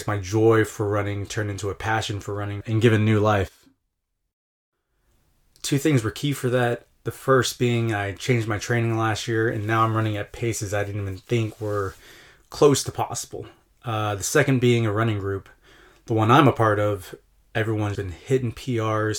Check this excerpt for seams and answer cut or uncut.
cut